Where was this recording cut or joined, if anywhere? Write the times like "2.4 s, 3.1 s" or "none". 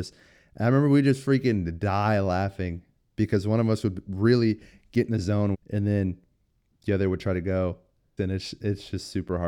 5.5 s, 8.2 s

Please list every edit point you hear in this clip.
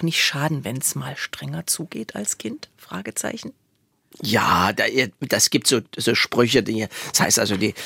none

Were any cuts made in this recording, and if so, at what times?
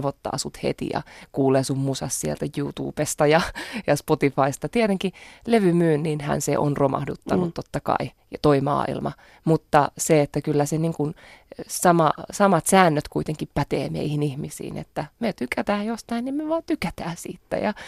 none

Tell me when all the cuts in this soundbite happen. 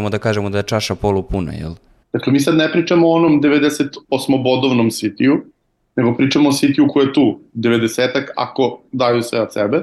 2.0 s

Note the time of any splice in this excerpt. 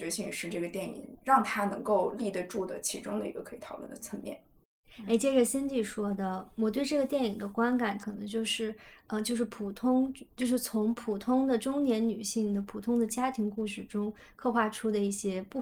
8.0 s

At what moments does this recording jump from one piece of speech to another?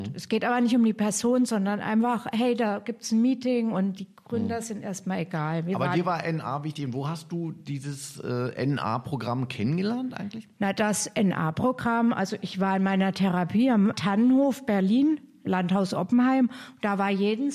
none

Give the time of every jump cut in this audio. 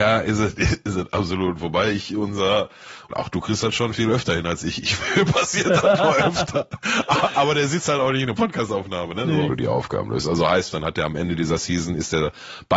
3.1 s, 9.5 s, 10.7 s

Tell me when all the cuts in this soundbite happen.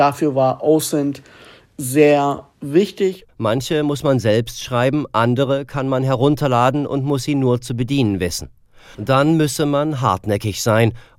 3.3 s, 8.9 s

